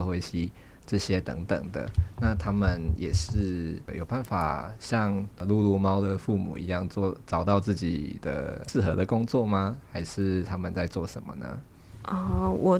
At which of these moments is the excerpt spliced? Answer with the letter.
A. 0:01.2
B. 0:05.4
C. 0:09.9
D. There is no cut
D